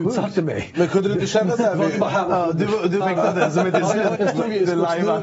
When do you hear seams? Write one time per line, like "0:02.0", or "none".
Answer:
0:03.0
0:04.2